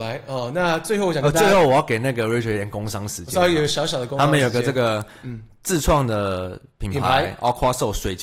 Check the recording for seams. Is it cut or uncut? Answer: uncut